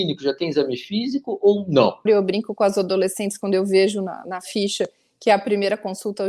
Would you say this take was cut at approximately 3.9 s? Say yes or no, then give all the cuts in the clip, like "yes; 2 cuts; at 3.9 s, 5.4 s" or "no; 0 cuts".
no; 1 cut; at 2.1 s